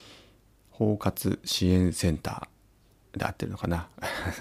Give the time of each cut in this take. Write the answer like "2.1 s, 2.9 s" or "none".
none